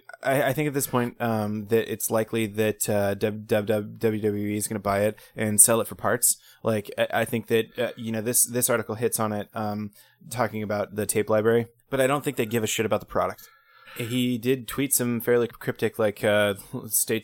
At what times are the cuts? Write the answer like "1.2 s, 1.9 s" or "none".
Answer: 11.8 s, 13.8 s, 15.5 s